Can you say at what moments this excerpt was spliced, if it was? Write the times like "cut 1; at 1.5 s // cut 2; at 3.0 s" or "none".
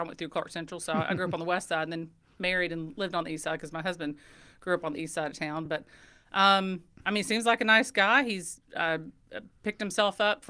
none